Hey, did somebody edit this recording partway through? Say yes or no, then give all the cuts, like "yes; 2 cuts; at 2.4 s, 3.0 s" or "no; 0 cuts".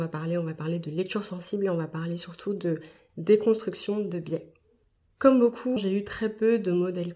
yes; 1 cut; at 5.8 s